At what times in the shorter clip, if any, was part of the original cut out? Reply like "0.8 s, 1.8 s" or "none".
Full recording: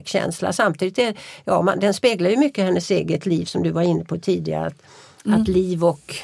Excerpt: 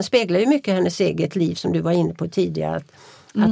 none

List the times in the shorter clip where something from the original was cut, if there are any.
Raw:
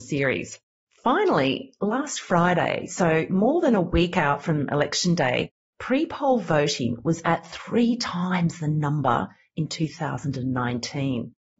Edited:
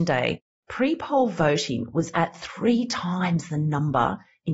none

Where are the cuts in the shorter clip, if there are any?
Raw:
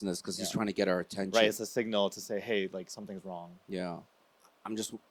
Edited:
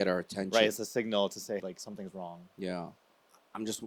1.6 s

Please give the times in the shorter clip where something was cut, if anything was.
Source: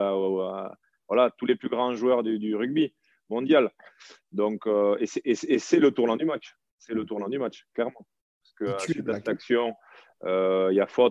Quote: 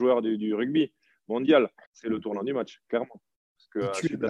1.8 s

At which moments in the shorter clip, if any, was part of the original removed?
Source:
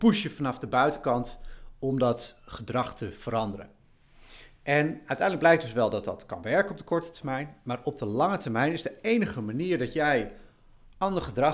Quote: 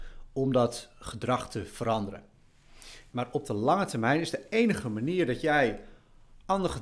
3.1 s

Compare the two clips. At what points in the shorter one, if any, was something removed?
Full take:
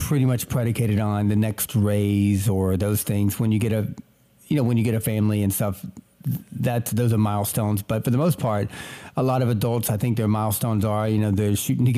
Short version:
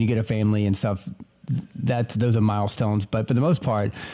none

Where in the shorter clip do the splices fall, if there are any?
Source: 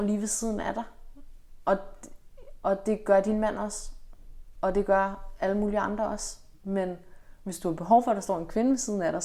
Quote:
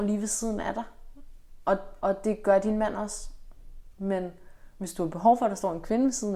2.0 s, 3.9 s

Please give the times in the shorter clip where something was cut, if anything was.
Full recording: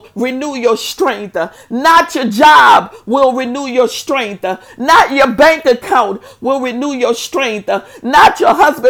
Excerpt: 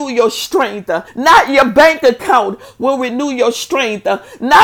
1.1 s

